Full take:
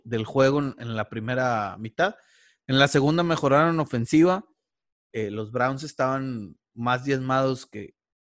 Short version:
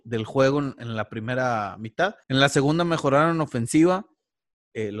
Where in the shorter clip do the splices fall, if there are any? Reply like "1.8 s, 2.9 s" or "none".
2.2 s